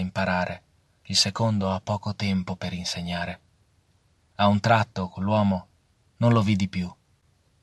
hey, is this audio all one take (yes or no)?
yes